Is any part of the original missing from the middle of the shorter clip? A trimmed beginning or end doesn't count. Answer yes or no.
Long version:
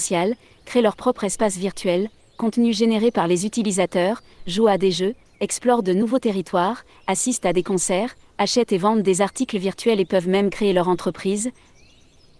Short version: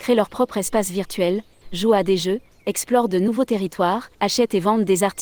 yes